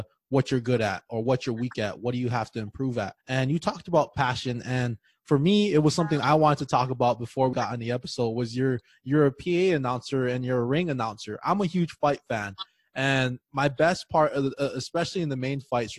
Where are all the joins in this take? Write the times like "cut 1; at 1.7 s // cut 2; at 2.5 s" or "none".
cut 1; at 3.2 s // cut 2; at 7.5 s